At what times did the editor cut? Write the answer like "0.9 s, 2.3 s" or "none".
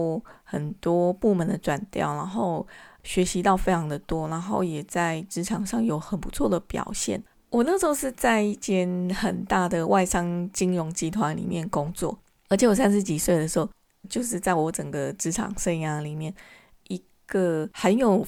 7.3 s, 14.0 s

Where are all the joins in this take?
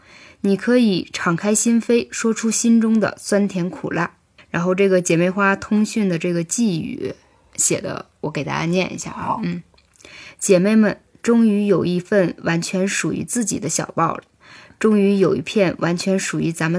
4.4 s

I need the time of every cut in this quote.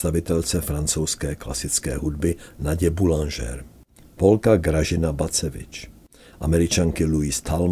4.0 s

